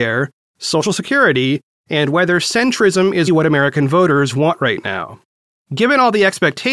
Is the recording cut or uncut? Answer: cut